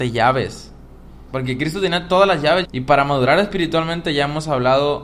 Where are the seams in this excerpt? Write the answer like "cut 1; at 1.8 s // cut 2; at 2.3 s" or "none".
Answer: cut 1; at 1.3 s // cut 2; at 2.6 s